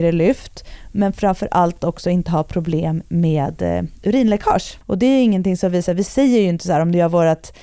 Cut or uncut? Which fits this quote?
uncut